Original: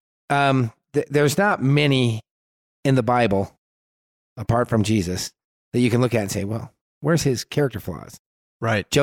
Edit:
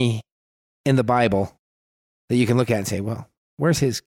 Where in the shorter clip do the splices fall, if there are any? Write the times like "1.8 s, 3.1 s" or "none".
2.1 s

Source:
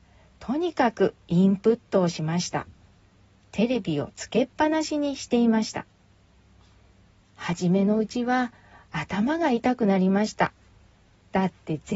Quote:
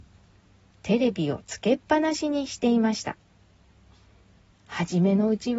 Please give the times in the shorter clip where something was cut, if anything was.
none

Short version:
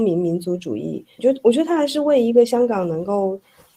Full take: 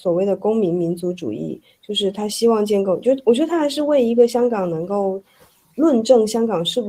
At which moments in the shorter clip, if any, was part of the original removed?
1.2 s

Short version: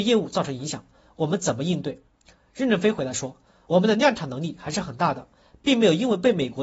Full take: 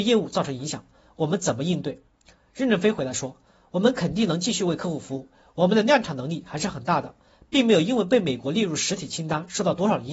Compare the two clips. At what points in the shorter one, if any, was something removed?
3.7 s

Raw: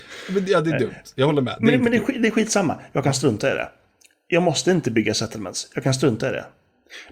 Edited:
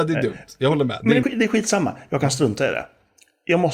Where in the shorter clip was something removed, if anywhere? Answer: 1.2 s

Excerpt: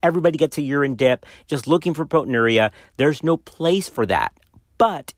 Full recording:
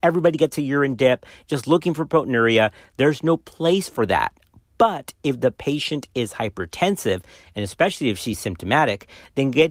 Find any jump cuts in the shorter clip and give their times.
none

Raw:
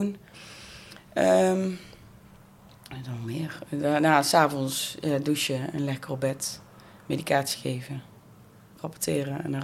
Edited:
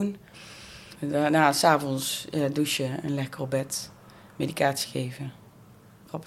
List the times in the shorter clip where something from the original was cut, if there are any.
1.0 s

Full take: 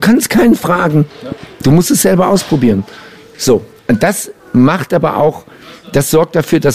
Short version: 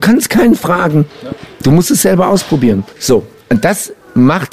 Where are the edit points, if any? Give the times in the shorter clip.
2.9 s

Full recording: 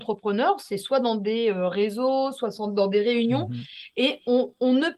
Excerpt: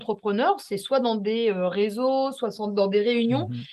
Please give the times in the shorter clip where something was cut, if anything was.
none

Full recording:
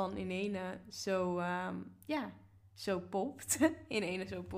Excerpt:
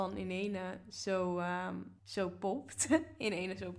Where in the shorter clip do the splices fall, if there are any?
2.0 s

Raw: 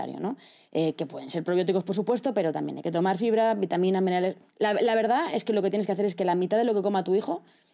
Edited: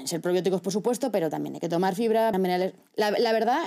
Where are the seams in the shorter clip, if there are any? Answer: 2.3 s

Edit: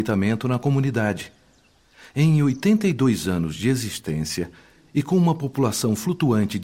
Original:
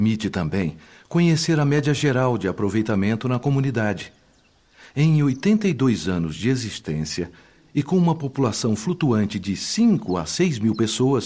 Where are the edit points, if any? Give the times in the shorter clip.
none

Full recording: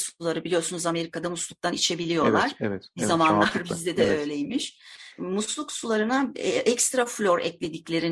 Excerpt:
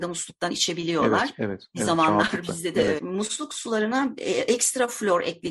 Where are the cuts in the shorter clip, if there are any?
3.0 s

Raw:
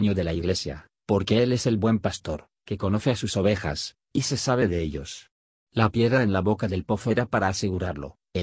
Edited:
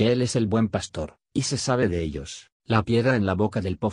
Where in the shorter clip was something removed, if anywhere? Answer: 1.3 s, 2.6 s

